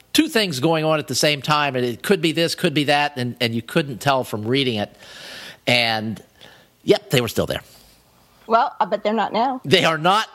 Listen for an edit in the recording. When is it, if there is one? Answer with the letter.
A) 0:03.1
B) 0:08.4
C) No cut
C